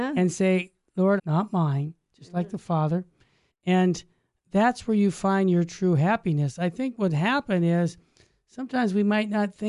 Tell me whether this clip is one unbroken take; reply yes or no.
no